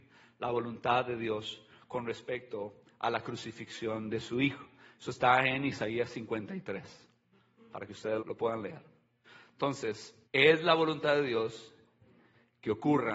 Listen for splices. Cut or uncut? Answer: cut